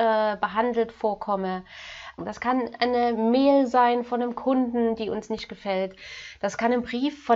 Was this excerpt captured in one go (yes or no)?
no